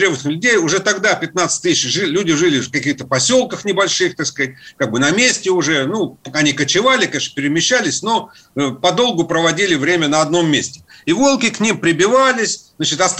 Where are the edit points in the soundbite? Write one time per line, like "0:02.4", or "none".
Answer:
none